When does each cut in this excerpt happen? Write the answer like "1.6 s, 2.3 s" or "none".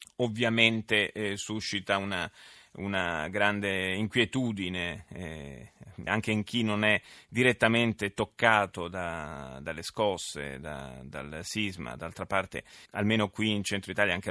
6.1 s, 12.9 s